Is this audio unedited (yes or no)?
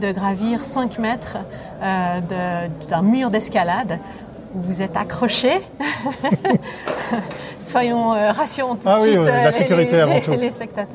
yes